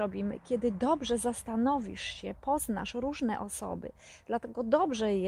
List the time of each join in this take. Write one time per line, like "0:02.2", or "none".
none